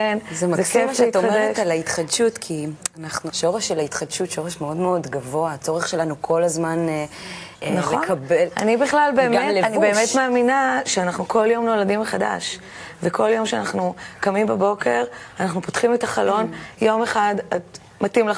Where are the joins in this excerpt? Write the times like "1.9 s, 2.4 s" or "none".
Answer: 3.3 s, 16.8 s